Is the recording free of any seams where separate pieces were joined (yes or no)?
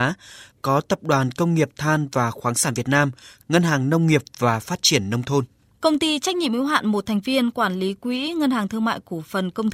no